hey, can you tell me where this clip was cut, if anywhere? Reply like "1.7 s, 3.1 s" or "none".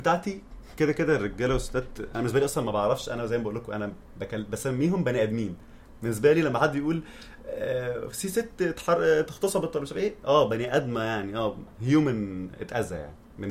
none